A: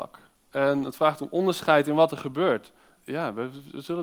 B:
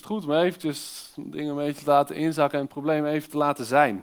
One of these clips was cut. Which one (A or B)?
A